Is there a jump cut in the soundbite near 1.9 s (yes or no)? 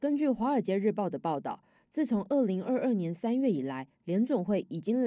no